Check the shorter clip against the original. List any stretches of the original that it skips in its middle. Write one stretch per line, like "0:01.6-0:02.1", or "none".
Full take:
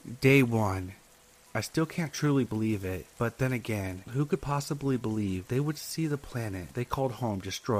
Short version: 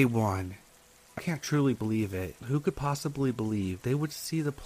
0:01.5-0:01.9
0:03.1-0:04.0